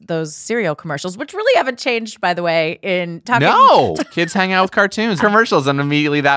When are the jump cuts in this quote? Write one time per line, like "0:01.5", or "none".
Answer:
0:04.0
0:05.2